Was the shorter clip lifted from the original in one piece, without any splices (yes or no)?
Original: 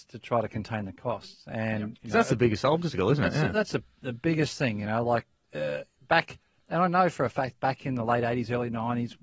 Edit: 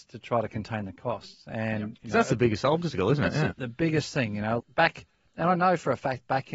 no